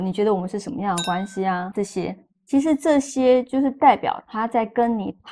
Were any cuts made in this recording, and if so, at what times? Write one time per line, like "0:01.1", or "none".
0:01.7